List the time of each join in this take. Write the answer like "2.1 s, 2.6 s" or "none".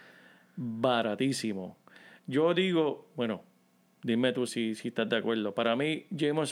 4.5 s